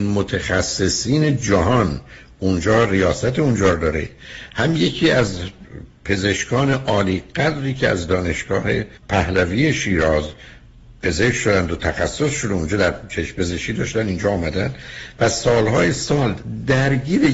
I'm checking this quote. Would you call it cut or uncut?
cut